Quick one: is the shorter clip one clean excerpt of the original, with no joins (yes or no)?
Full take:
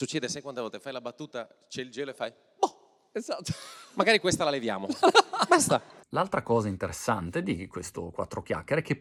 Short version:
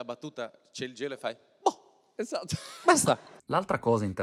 no